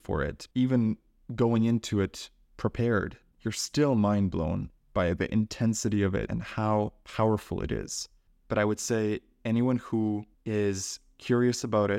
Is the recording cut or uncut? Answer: cut